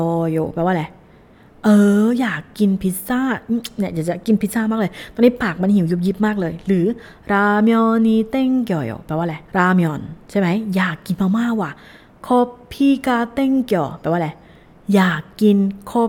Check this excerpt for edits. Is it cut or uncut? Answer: cut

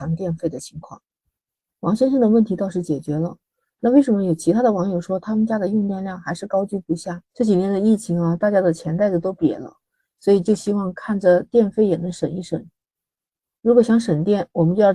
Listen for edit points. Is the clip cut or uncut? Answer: cut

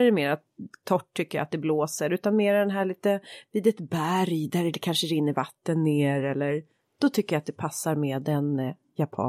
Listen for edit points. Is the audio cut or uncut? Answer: uncut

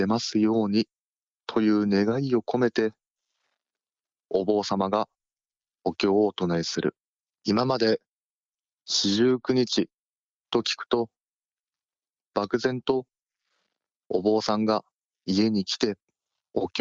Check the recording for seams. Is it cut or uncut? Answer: cut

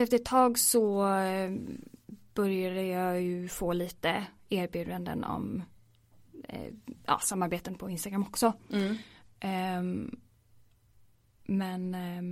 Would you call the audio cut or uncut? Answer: uncut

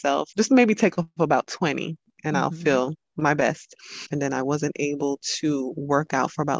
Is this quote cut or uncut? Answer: cut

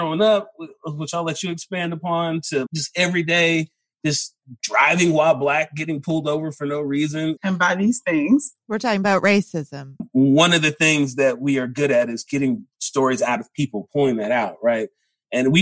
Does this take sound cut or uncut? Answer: cut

